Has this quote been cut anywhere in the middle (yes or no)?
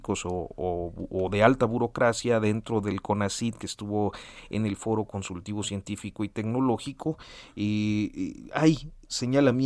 no